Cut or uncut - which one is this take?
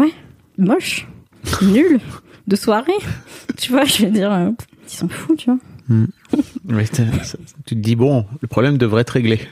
cut